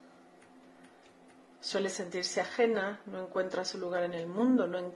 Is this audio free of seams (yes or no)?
yes